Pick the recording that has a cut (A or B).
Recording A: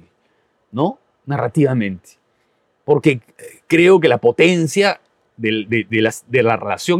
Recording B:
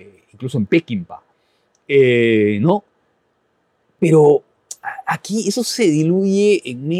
A